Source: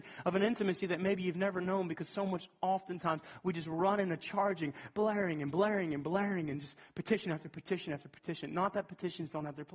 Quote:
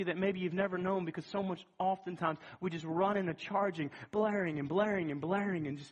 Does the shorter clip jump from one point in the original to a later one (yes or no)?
no